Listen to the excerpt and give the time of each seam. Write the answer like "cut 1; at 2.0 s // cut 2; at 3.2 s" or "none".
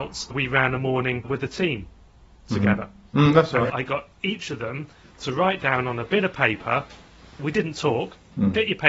cut 1; at 3.7 s